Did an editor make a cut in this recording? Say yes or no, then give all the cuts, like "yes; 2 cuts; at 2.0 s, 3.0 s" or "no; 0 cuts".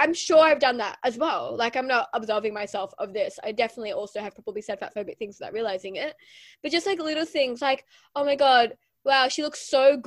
no; 0 cuts